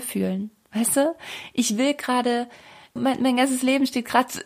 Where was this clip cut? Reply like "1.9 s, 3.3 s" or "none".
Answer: 3.0 s